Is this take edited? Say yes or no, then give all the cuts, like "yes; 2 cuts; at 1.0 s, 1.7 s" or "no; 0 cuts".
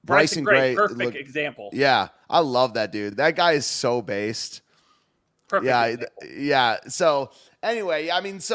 no; 0 cuts